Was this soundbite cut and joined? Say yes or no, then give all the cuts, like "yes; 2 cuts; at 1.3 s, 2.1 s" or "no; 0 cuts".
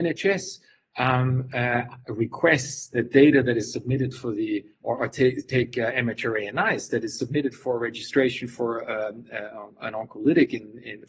no; 0 cuts